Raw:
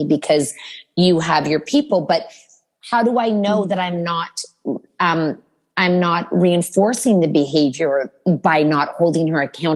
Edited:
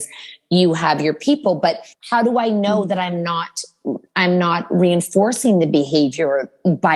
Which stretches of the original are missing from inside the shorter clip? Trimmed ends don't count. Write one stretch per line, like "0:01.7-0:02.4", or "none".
0:02.4-0:02.7
0:04.9-0:05.7